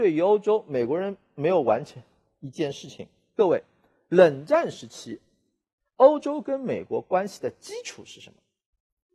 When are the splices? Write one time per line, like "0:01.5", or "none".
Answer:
none